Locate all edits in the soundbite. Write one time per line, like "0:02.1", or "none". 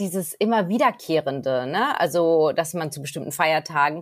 none